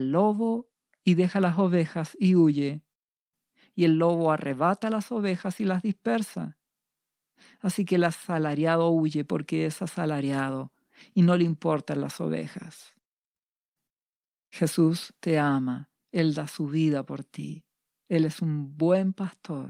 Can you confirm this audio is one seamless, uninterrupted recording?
yes; 0 cuts

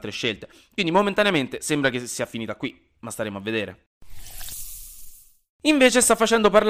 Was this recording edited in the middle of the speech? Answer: no; 0 cuts

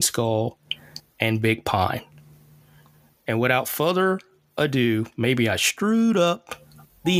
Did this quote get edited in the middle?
no; 0 cuts

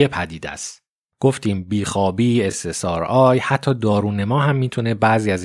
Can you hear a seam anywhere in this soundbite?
no; 0 cuts

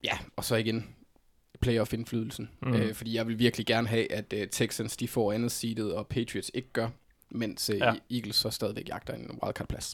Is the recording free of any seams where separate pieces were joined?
yes; 0 cuts

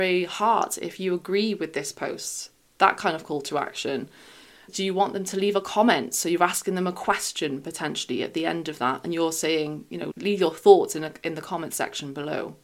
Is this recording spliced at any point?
no; 0 cuts

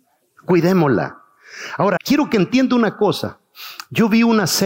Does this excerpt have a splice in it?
yes; 1 cut; at 2.0 s

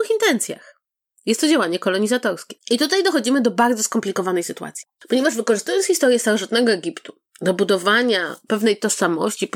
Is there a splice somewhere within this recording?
yes; 1 cut; at 2.6 s

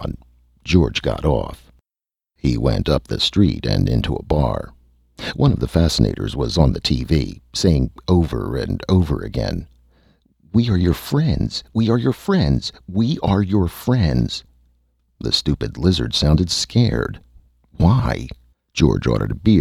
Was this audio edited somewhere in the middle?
yes; 1 cut; at 18.5 s

